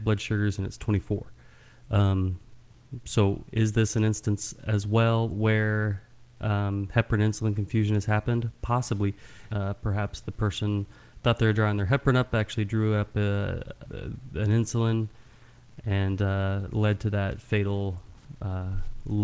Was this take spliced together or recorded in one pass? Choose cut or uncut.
cut